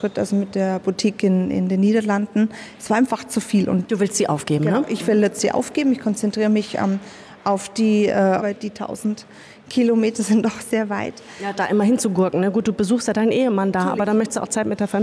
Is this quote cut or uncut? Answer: cut